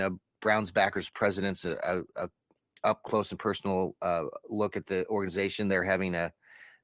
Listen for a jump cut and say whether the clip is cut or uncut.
uncut